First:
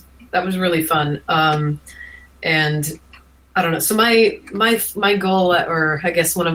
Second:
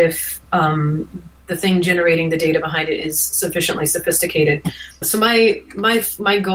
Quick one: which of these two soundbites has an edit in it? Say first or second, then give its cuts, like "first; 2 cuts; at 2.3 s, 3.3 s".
second; 1 cut; at 5.0 s